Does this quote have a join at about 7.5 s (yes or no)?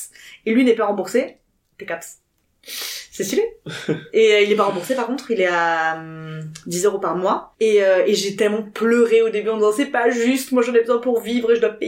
yes